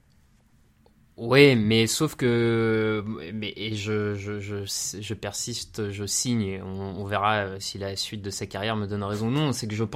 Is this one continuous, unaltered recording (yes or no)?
yes